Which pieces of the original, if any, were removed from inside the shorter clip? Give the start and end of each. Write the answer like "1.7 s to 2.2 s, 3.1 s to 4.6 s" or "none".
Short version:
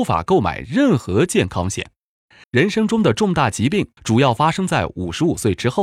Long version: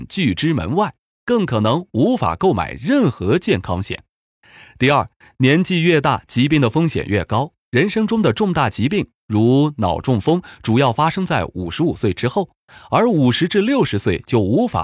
4.6 s to 7.6 s, 9.2 s to 10.6 s